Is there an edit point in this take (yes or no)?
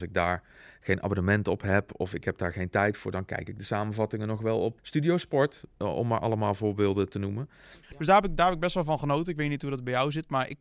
yes